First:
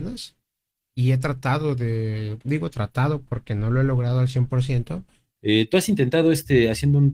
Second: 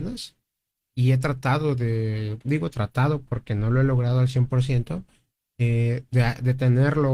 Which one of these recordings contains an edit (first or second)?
first